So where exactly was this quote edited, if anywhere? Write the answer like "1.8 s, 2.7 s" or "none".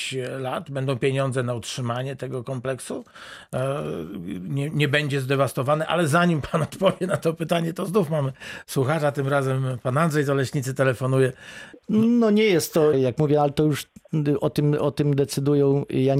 11.7 s, 12.9 s